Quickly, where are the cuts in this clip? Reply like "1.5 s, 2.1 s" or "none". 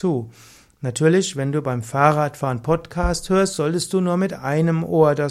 none